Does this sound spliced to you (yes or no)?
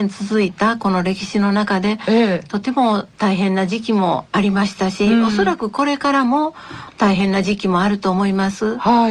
no